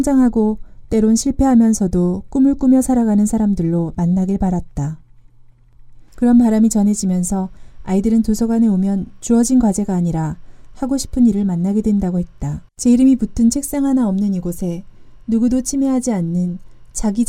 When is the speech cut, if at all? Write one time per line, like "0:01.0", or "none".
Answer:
0:06.1
0:12.7

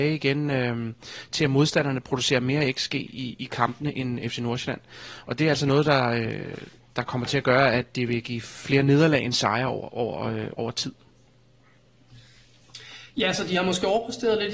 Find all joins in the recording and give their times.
none

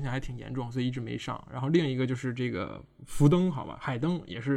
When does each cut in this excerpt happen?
none

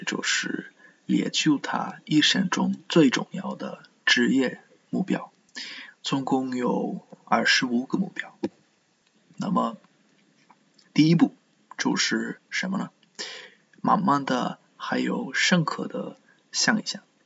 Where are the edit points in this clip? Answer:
0:09.1

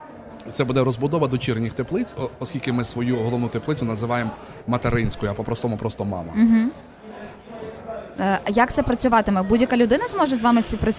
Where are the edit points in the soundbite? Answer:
none

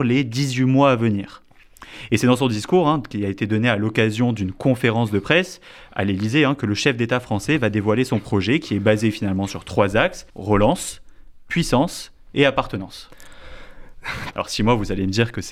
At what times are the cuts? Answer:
0:10.3
0:14.3

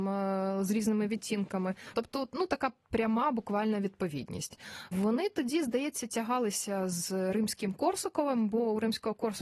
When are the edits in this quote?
0:01.9

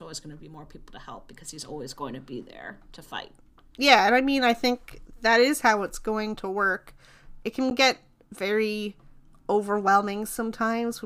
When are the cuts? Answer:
none

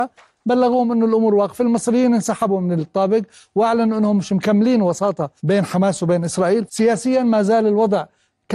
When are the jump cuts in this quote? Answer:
0:05.4
0:06.7

